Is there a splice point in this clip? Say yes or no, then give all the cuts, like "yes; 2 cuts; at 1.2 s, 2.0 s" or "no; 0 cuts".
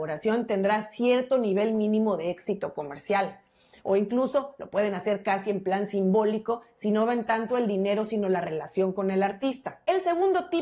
no; 0 cuts